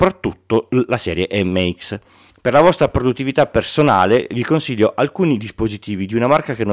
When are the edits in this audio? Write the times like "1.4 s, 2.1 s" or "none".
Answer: 2.3 s